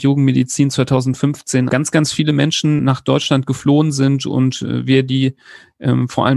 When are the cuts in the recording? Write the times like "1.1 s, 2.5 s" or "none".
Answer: 1.7 s, 2.8 s